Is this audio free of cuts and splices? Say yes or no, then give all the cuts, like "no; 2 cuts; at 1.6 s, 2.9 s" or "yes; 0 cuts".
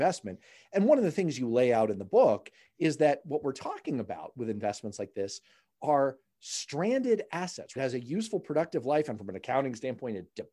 no; 1 cut; at 7.8 s